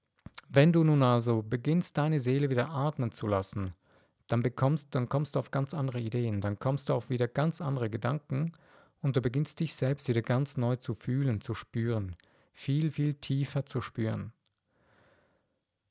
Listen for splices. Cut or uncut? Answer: uncut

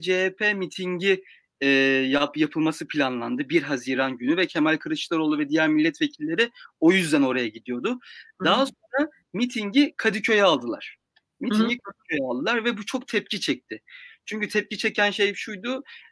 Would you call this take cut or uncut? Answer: uncut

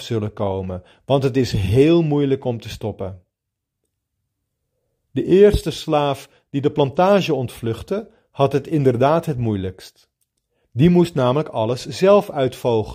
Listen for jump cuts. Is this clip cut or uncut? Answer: uncut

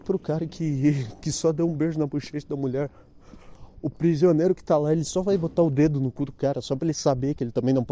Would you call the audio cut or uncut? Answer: uncut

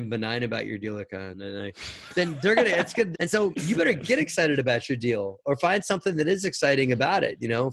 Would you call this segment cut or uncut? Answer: cut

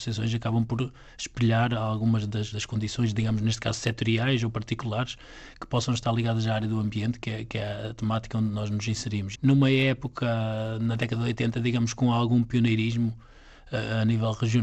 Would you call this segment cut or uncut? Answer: cut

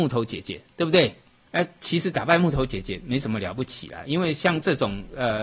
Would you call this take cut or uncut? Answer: cut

